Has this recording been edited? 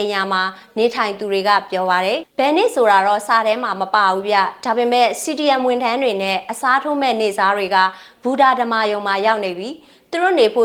yes; 1 cut; at 2.2 s

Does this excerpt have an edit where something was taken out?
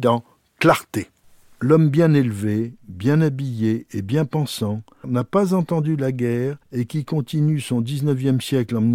yes; 2 cuts; at 5.0 s, 6.6 s

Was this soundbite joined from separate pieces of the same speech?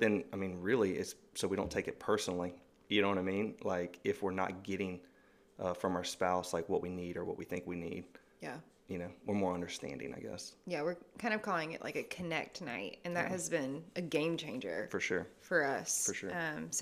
no; 0 cuts

